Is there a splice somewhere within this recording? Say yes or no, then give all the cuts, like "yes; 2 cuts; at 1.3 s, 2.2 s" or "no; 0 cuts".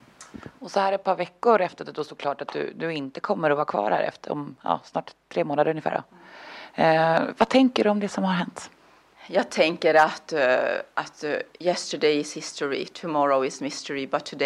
no; 0 cuts